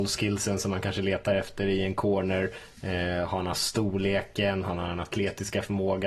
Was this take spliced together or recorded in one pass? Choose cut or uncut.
uncut